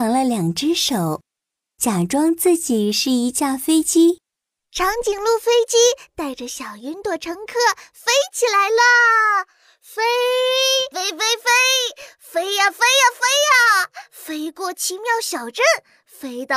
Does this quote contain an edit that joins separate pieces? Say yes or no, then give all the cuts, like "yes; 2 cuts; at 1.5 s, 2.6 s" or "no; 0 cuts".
yes; 1 cut; at 10.9 s